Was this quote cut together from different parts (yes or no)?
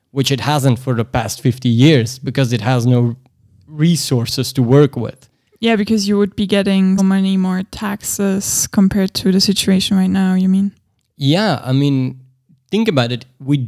yes